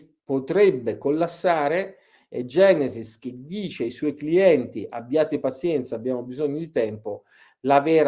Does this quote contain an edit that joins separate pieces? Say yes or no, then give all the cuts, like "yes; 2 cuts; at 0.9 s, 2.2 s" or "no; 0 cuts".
no; 0 cuts